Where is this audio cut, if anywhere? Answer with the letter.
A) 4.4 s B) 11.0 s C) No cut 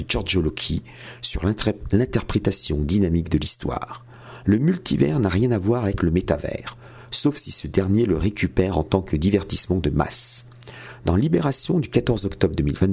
A